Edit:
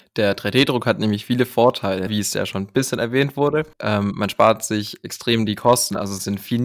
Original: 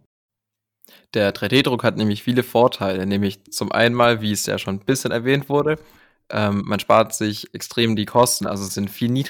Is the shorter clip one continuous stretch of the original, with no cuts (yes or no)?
no